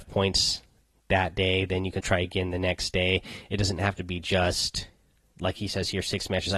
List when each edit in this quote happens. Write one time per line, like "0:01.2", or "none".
0:02.0